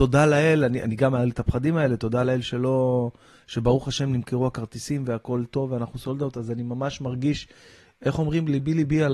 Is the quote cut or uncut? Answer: uncut